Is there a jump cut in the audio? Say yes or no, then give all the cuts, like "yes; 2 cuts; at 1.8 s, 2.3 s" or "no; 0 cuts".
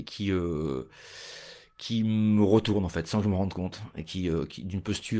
no; 0 cuts